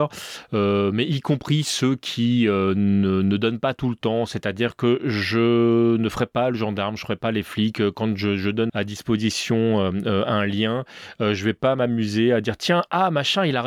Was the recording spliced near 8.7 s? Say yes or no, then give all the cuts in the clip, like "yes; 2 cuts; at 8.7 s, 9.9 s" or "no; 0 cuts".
yes; 1 cut; at 8.7 s